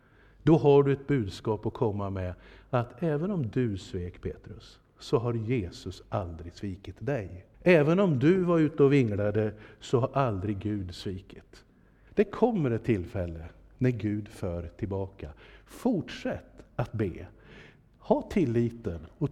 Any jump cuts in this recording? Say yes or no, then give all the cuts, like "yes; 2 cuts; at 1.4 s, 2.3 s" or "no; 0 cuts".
yes; 2 cuts; at 7.5 s, 12.1 s